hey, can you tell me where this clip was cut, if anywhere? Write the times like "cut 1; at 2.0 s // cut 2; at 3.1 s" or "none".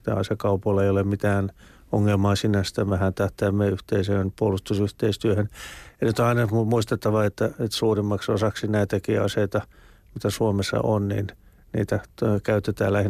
none